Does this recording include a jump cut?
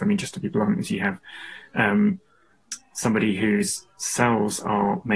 no; 0 cuts

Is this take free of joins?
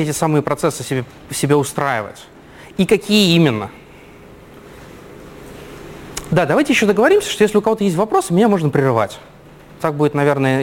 yes; 0 cuts

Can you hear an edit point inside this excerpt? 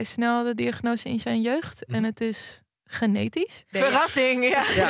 yes; 1 cut; at 3.7 s

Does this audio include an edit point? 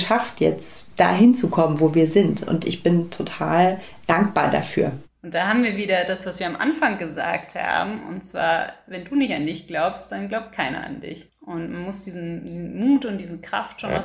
no; 0 cuts

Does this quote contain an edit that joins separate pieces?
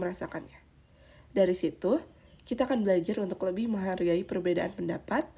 no; 0 cuts

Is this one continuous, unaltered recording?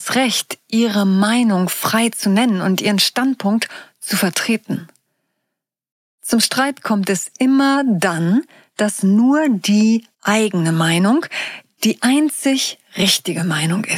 no; 2 cuts; at 8.7 s, 10.1 s

